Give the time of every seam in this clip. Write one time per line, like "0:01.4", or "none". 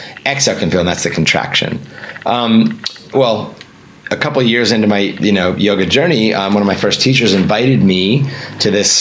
0:03.1